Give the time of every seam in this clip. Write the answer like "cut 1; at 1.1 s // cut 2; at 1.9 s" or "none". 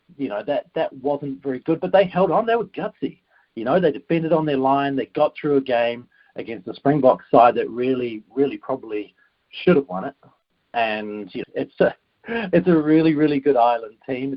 cut 1; at 11.4 s

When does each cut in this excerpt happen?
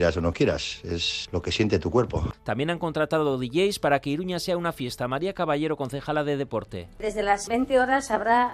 cut 1; at 2.3 s

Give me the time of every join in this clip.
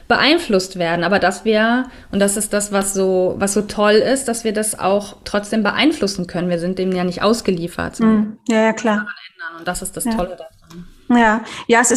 none

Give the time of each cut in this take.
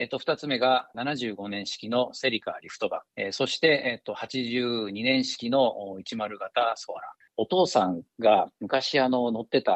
cut 1; at 7.3 s

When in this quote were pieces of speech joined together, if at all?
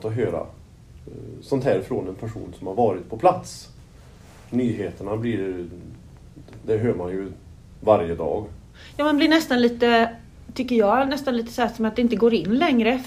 none

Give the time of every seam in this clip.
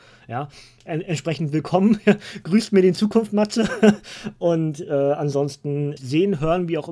cut 1; at 6.0 s

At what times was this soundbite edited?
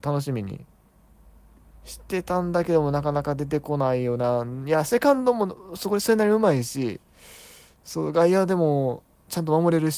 none

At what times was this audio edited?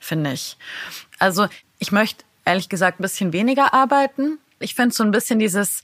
cut 1; at 1.1 s // cut 2; at 3.0 s // cut 3; at 4.6 s

